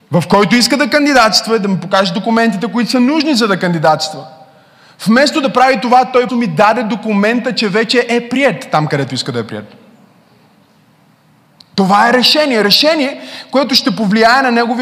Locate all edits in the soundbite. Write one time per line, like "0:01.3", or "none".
0:06.3